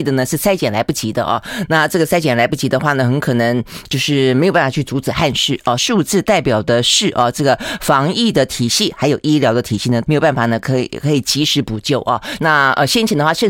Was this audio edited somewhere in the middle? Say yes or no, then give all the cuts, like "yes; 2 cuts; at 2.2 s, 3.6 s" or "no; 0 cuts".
yes; 3 cuts; at 5.8 s, 10.1 s, 12.4 s